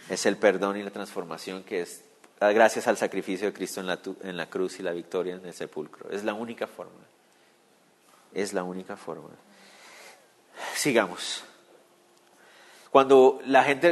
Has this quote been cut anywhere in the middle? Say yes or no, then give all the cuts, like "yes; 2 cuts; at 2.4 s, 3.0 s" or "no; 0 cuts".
yes; 1 cut; at 12.9 s